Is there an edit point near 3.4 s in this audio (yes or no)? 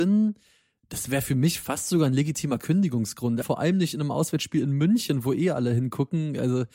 yes